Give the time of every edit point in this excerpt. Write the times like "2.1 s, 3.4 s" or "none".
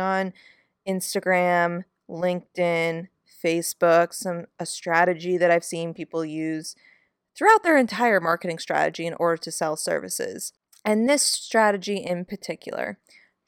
none